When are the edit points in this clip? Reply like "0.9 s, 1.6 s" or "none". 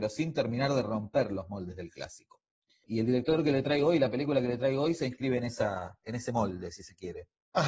none